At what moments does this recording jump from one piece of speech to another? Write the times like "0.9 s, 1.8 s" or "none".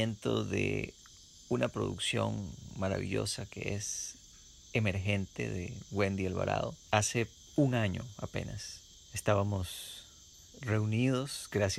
6.9 s